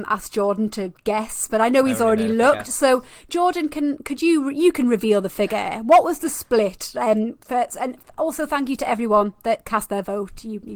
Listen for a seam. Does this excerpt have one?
no; 0 cuts

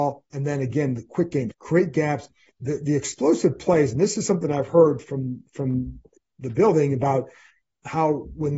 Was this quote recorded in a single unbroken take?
no; 1 cut; at 1.5 s

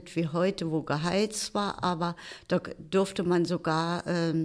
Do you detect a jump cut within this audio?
no; 0 cuts

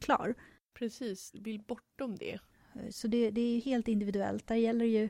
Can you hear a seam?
yes; 1 cut; at 1.3 s

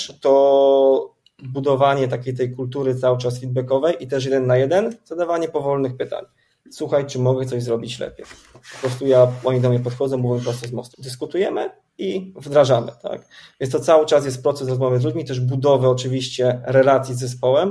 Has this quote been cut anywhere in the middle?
yes; 2 cuts; at 8.5 s, 10.9 s

